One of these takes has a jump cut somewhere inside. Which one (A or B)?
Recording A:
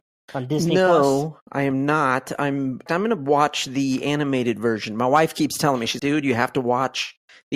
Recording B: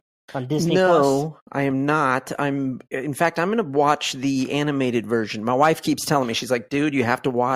A